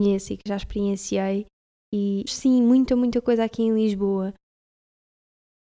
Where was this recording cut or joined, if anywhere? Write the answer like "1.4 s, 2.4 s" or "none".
2.3 s